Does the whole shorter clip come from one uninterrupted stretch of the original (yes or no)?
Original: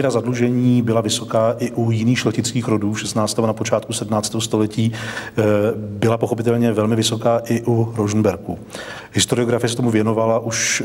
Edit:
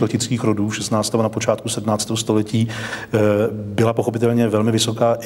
yes